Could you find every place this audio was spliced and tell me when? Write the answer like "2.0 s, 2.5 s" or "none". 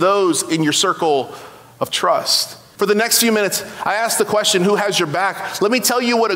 2.8 s